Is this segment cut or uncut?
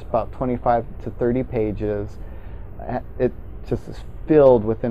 uncut